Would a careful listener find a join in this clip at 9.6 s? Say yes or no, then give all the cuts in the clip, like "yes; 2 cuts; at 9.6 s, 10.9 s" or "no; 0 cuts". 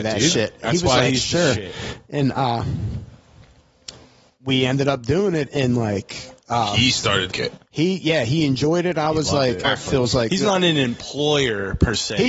yes; 2 cuts; at 7.3 s, 9.6 s